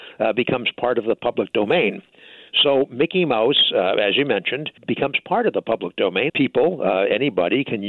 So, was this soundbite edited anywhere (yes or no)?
yes